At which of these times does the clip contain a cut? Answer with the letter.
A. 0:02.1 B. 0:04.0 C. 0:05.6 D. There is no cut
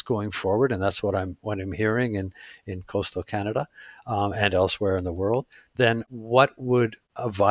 D